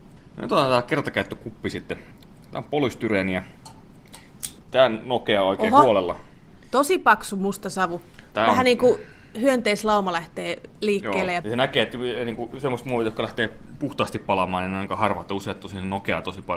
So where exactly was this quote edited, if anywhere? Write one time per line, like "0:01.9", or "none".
0:08.3
0:11.4